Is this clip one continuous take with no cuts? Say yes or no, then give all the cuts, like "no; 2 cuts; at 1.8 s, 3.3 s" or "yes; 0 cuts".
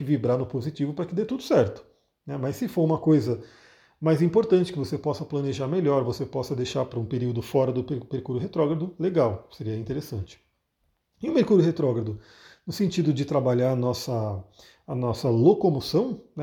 yes; 0 cuts